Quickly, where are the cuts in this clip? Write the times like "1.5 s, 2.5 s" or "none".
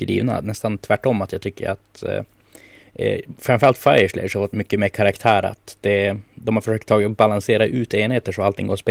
none